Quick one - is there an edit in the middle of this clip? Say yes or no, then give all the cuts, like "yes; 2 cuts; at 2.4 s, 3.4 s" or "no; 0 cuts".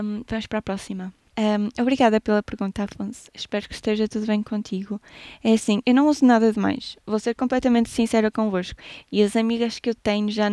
yes; 3 cuts; at 1.3 s, 5.8 s, 9.0 s